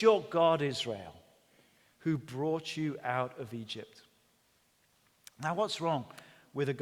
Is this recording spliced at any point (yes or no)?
no